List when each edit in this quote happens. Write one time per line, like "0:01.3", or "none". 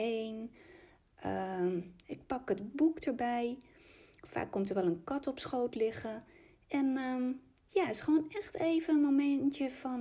none